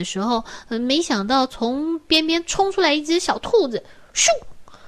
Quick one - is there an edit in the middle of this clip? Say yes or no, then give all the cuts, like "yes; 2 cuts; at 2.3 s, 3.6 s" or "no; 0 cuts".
no; 0 cuts